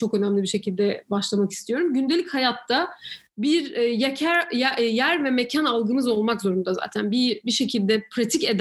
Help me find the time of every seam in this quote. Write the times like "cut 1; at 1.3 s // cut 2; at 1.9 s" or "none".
none